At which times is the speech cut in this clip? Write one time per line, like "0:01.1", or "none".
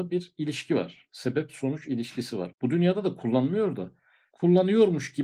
0:02.5